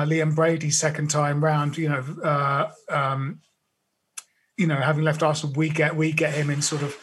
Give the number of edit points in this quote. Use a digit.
0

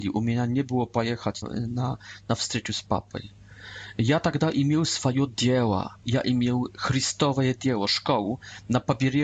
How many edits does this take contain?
2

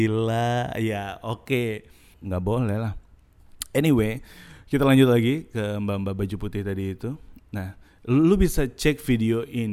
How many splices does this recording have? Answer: 1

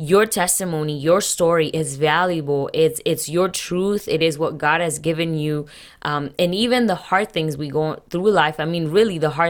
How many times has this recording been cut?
0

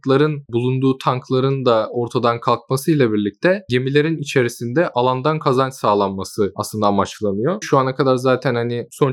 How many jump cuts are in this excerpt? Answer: 1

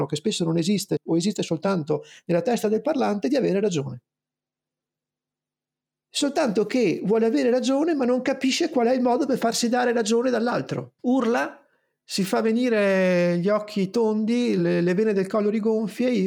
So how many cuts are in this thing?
2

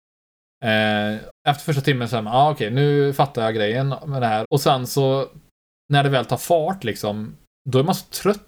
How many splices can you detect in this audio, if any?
2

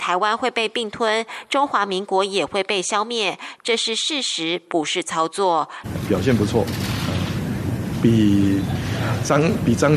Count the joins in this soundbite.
1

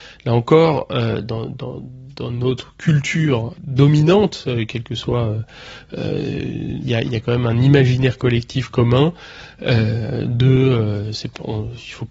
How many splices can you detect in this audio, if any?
1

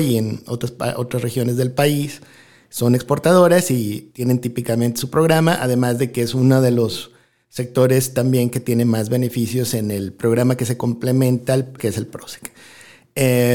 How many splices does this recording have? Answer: 2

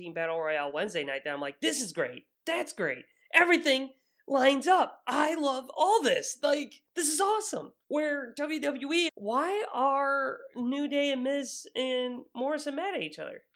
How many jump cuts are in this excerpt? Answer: 1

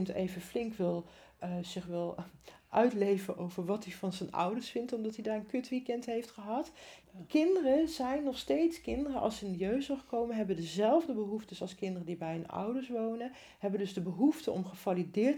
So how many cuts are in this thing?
1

